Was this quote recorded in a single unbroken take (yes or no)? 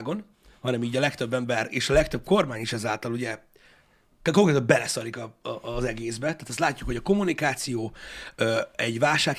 yes